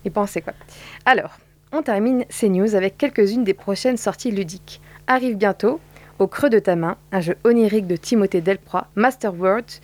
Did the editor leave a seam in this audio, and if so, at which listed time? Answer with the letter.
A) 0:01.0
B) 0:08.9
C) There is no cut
B